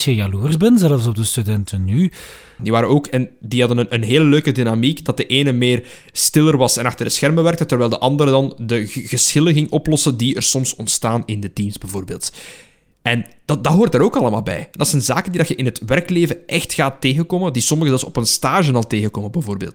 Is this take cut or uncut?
cut